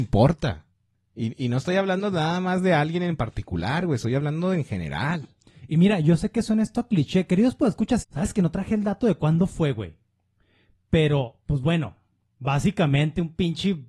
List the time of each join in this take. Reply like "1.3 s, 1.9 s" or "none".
8.0 s